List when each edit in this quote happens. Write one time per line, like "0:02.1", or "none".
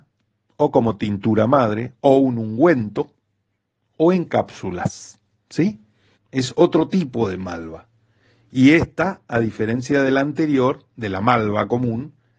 0:06.1